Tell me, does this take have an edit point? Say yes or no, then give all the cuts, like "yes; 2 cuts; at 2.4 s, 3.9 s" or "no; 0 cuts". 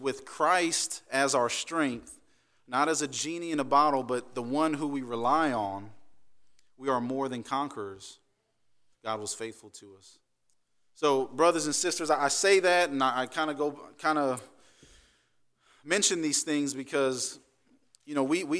yes; 1 cut; at 8.9 s